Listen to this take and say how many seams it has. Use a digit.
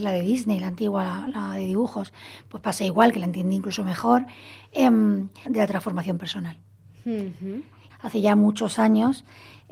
2